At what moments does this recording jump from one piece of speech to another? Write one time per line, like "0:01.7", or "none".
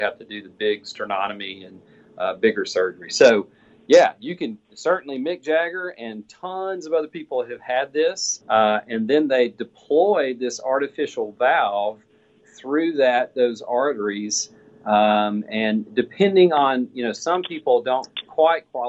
0:08.4